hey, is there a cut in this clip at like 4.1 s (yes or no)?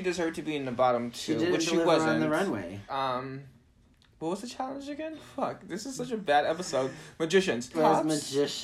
no